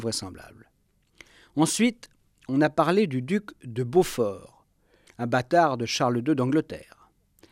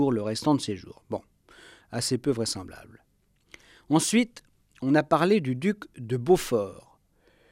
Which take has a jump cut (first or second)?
first